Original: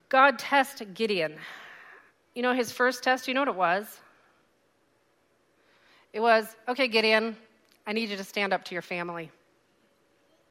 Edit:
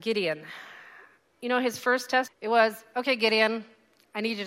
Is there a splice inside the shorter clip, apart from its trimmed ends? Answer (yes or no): yes